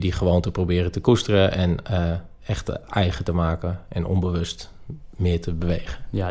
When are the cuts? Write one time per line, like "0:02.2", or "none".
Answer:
0:02.4